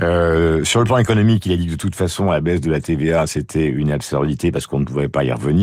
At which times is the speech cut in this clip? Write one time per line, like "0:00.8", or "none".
none